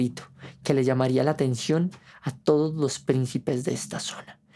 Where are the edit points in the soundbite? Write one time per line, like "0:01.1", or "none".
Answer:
none